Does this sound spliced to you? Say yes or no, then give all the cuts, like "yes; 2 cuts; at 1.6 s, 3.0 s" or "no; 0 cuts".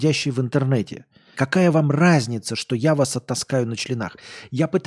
yes; 1 cut; at 1.3 s